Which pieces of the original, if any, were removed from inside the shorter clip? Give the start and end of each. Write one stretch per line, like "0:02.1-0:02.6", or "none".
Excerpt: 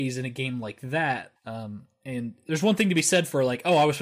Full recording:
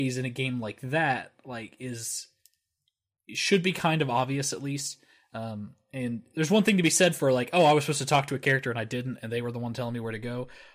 0:01.4-0:05.2